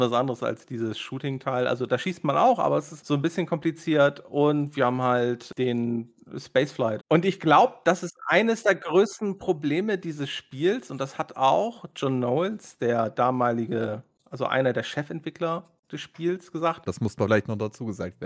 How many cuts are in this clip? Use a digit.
3